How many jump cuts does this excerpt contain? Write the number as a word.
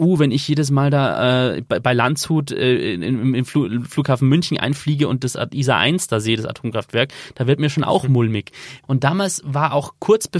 one